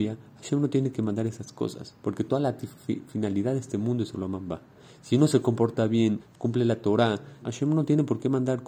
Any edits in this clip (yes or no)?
yes